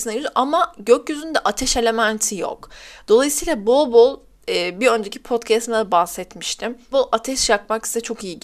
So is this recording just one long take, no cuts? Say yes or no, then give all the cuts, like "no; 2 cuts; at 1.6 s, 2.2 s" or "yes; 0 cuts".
no; 1 cut; at 6.9 s